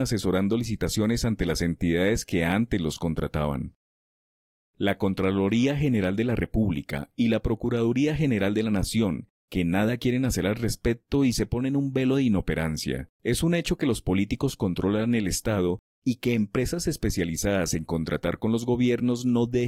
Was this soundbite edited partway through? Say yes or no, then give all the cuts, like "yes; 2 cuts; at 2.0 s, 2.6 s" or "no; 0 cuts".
yes; 1 cut; at 13.1 s